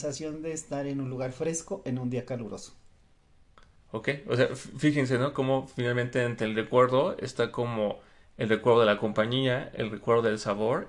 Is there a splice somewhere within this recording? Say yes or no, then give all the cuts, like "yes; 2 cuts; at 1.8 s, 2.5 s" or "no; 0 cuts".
no; 0 cuts